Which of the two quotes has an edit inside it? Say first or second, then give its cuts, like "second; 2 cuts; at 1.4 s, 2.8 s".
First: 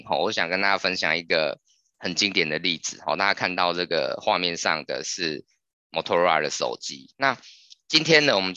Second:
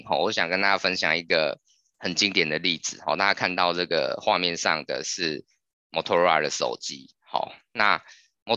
first; 1 cut; at 7.1 s